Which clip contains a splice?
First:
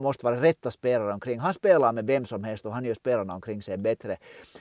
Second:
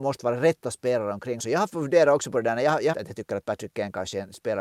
second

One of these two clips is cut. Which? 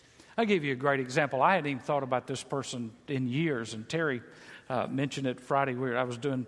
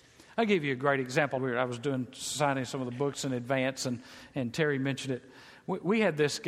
second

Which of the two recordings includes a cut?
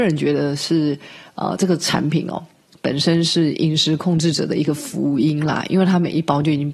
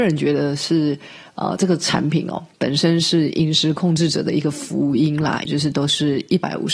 second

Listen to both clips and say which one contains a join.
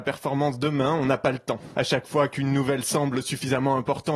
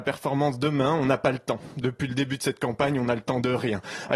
first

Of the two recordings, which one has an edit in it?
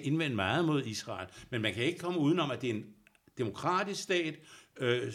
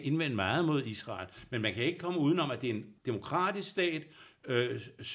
second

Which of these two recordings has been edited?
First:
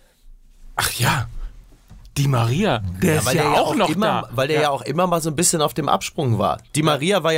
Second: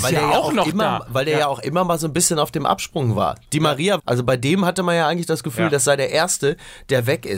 second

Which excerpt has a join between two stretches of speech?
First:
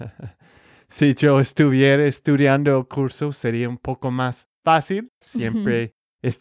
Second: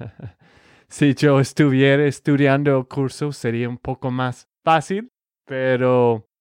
first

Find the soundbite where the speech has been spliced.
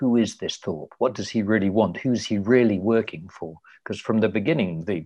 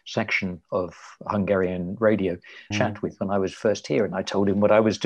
second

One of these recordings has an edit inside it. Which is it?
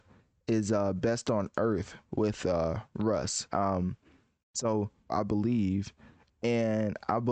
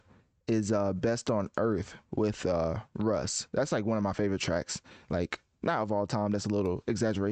first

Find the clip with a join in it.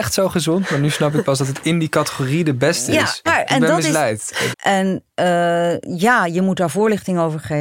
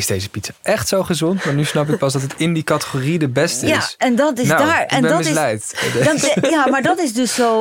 first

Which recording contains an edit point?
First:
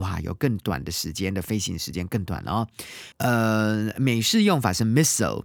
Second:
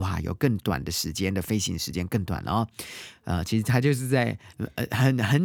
first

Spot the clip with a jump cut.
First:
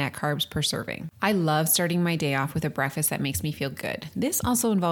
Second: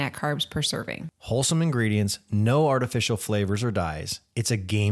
first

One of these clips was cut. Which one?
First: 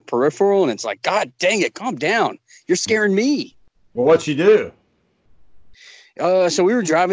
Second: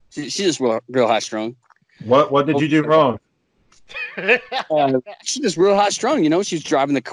second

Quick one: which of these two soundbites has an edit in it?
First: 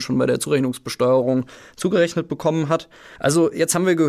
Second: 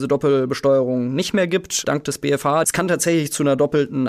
first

